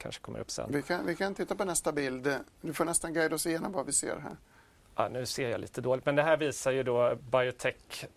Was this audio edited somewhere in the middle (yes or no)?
no